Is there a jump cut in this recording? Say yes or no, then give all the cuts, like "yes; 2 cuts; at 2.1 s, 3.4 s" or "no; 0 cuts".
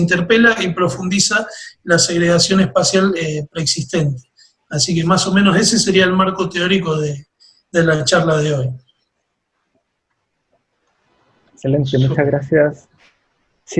no; 0 cuts